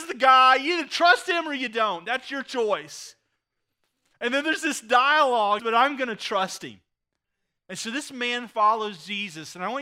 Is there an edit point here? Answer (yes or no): yes